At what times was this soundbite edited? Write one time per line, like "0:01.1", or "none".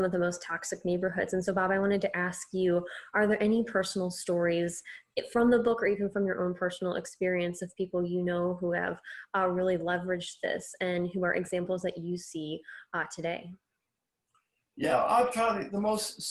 none